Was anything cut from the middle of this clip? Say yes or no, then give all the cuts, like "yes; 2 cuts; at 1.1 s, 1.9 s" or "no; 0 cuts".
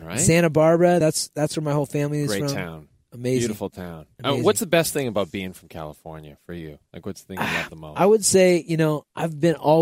no; 0 cuts